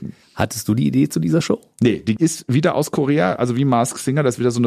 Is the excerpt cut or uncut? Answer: uncut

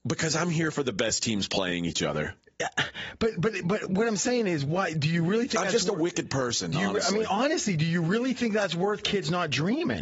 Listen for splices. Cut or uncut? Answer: uncut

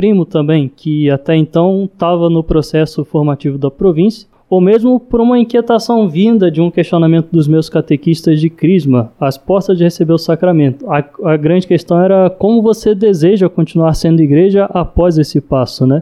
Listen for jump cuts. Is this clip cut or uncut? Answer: uncut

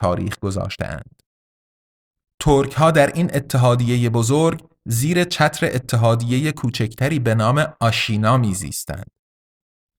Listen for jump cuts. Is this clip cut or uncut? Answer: uncut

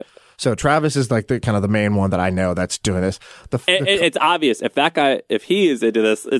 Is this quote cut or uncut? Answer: uncut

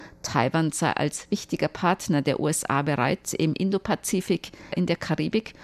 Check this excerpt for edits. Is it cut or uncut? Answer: cut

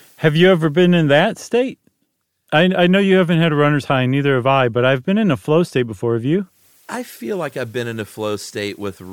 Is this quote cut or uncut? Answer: uncut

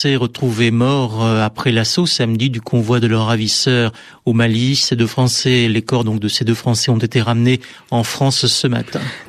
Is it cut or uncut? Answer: uncut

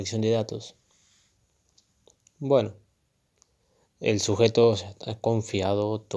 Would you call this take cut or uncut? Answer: uncut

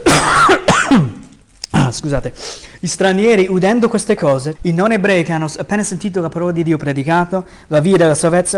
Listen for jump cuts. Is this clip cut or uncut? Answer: cut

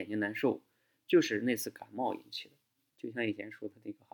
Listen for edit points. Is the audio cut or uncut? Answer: cut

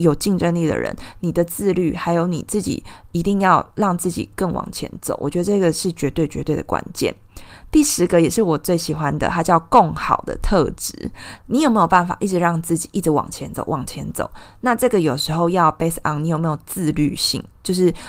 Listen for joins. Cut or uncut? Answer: cut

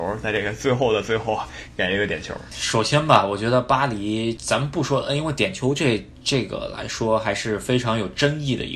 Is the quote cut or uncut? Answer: uncut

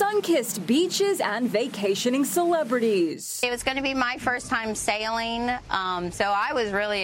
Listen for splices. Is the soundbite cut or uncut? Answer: uncut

